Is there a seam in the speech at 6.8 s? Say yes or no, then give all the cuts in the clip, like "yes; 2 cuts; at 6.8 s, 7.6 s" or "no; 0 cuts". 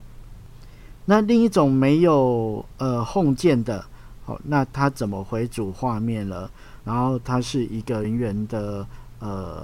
yes; 2 cuts; at 6.8 s, 8.0 s